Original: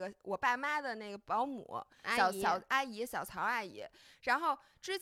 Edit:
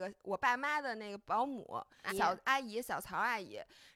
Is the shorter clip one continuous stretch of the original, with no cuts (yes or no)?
no